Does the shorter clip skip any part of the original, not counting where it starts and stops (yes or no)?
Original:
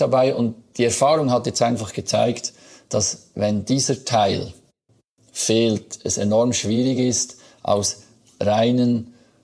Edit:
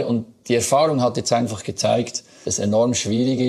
yes